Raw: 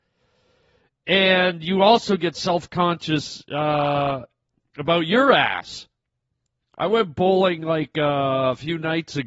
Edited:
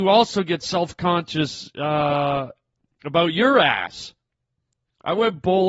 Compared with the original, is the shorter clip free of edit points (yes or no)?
yes